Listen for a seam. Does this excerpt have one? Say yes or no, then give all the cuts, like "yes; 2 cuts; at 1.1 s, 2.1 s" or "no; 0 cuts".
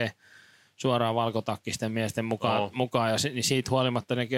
no; 0 cuts